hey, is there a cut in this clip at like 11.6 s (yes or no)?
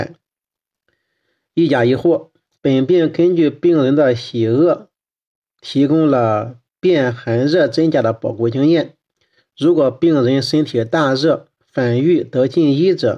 no